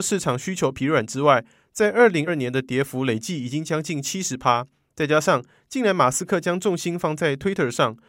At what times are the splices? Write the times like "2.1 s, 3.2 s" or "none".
2.3 s